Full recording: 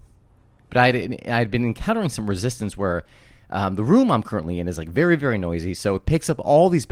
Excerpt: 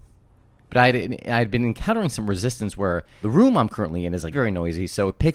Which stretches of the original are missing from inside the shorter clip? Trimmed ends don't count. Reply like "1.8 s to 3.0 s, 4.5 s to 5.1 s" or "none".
3.2 s to 3.8 s, 4.8 s to 5.2 s